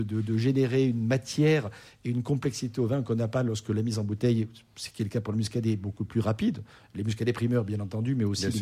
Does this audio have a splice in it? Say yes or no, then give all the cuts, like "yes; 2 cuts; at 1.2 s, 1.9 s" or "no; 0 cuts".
no; 0 cuts